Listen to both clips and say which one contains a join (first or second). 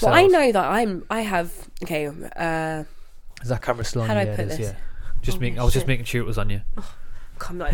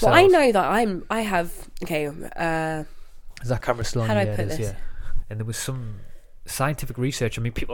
second